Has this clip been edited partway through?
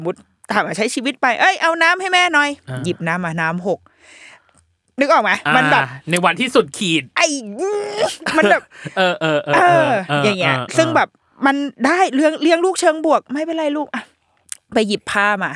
no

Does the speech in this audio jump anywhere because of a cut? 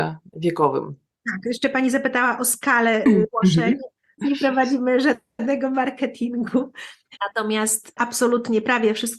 yes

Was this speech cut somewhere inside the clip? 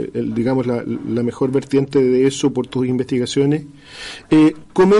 no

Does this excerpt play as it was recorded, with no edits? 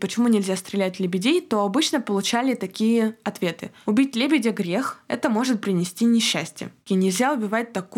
no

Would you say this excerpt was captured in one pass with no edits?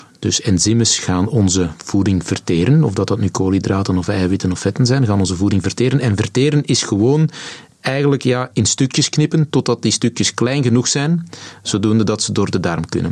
yes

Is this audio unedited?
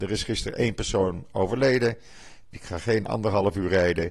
no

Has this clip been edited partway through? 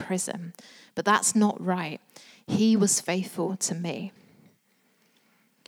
no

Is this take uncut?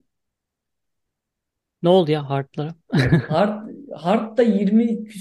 yes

